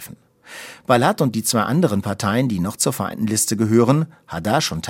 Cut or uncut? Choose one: uncut